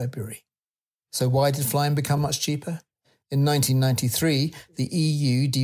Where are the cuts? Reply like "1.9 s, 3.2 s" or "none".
2.2 s